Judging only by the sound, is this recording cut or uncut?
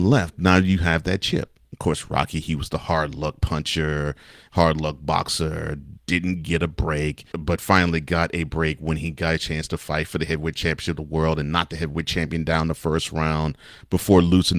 cut